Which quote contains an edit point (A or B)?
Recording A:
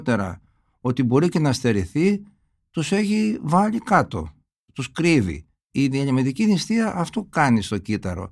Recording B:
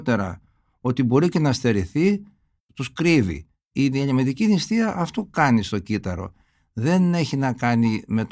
B